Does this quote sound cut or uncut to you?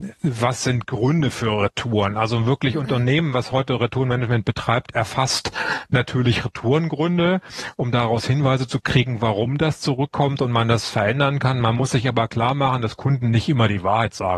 uncut